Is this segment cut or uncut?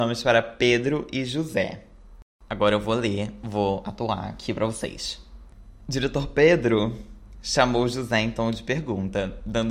uncut